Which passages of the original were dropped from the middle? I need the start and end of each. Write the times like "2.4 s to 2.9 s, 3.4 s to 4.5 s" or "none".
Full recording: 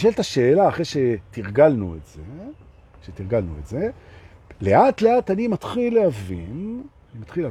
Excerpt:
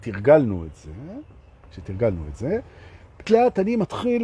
4.5 s to 5.0 s